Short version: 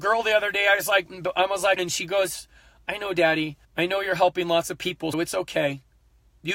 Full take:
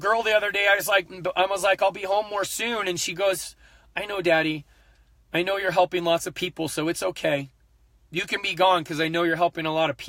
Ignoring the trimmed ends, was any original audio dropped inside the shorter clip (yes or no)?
yes